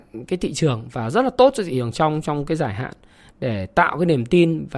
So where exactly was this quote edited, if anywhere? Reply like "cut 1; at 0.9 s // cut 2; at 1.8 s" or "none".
none